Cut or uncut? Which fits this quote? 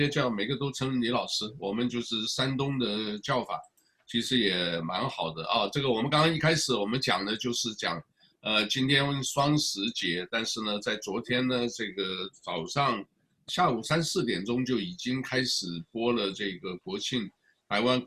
cut